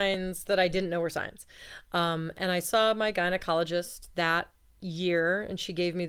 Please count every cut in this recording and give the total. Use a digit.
0